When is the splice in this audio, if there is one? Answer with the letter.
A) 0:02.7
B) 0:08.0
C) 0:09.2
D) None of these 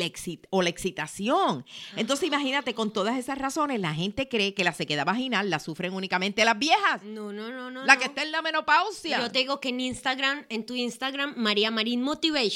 D